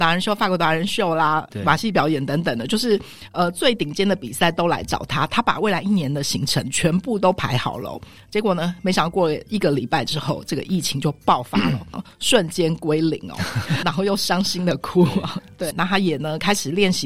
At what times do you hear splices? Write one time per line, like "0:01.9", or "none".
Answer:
0:11.9
0:13.8
0:15.7